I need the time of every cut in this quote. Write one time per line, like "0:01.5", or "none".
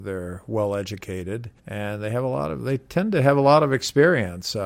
0:01.6